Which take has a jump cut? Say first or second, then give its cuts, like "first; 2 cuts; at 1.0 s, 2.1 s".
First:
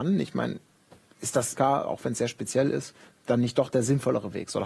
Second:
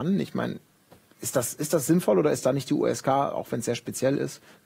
first; 1 cut; at 1.5 s